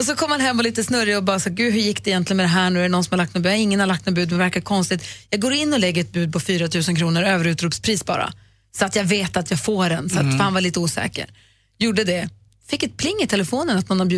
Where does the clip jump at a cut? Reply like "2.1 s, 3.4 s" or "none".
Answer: none